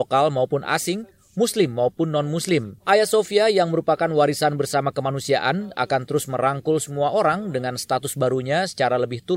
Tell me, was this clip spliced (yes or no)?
yes